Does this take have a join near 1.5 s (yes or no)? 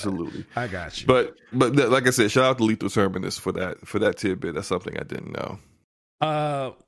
yes